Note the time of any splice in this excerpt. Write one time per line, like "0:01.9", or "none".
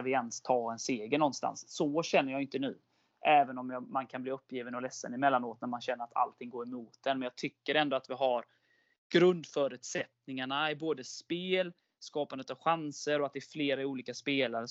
none

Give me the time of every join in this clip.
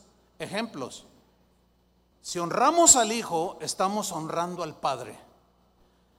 0:02.1

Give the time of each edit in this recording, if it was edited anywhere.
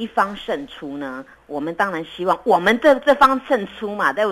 none

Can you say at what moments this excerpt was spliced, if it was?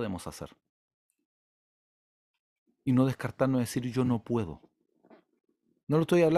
none

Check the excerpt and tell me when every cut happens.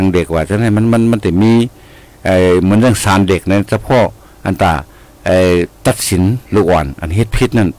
0:06.5

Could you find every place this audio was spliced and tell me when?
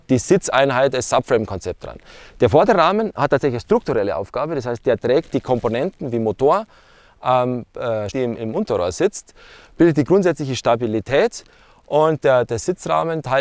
0:08.1

